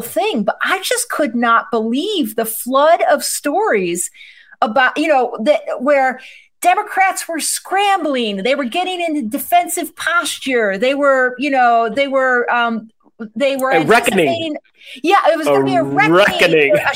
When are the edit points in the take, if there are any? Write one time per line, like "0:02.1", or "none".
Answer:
none